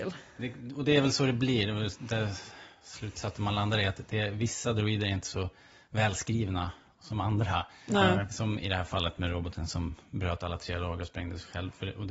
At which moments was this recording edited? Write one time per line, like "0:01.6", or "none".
none